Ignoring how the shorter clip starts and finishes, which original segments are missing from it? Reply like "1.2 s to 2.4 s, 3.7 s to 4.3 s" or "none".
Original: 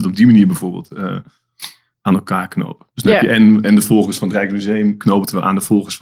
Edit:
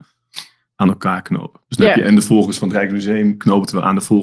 3.3 s to 3.6 s